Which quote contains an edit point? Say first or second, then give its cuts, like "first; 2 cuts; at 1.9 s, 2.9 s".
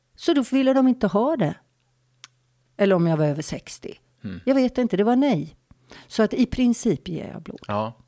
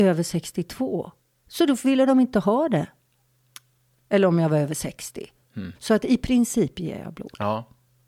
second; 1 cut; at 5.7 s